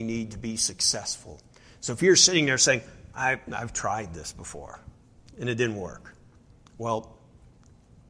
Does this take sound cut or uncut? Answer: uncut